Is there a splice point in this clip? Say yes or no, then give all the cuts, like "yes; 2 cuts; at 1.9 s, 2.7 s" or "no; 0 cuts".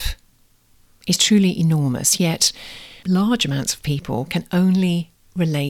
yes; 1 cut; at 3.0 s